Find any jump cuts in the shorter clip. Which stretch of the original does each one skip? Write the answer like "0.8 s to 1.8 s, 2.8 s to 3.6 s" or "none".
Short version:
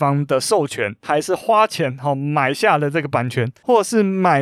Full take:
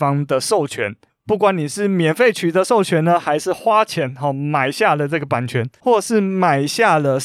1.0 s to 3.2 s